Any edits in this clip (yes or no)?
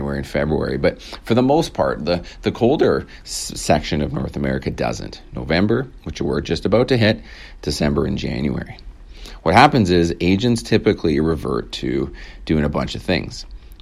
no